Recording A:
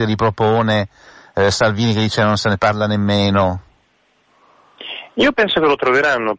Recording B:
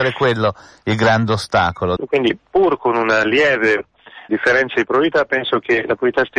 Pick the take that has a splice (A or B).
B